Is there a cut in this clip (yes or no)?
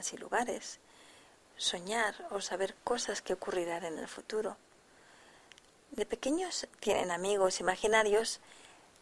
no